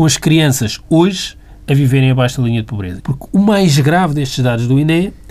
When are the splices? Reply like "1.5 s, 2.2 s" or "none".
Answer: 3.0 s